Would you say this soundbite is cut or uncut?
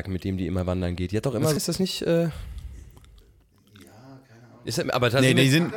cut